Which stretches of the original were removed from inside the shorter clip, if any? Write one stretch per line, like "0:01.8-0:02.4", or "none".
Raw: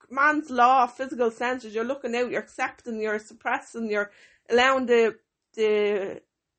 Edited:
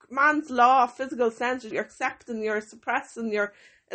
0:01.7-0:02.3